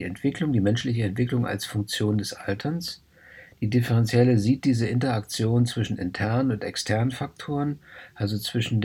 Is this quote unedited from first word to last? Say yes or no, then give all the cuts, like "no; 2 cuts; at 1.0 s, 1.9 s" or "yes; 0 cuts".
yes; 0 cuts